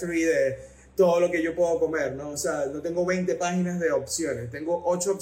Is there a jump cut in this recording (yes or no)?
no